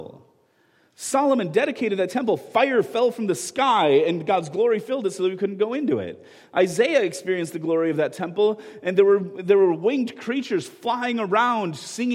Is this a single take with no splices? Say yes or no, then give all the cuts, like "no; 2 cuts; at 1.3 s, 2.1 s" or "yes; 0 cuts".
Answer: yes; 0 cuts